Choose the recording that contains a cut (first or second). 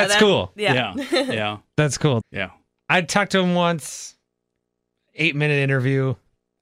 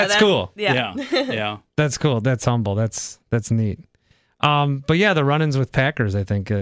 first